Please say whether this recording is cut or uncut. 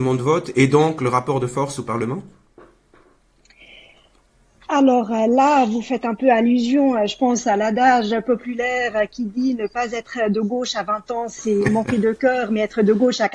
uncut